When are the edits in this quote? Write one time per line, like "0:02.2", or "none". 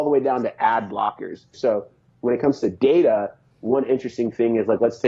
0:01.5